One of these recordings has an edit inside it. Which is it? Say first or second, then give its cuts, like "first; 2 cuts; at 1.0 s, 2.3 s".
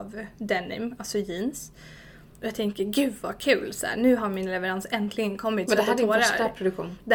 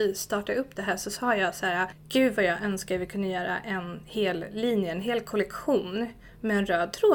first; 1 cut; at 5.7 s